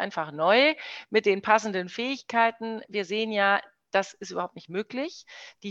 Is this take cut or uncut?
uncut